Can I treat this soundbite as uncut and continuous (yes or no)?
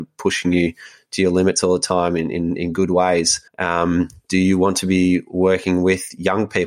no